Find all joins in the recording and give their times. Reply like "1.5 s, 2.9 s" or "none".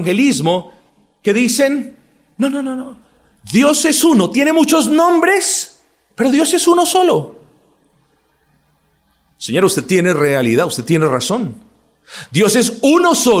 none

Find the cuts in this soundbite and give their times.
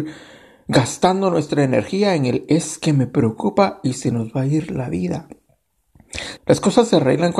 6.4 s

